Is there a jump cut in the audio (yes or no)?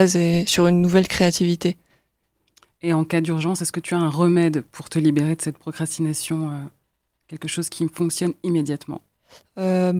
no